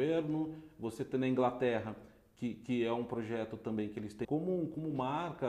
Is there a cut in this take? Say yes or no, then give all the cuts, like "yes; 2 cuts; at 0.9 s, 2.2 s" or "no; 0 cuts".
yes; 1 cut; at 4.2 s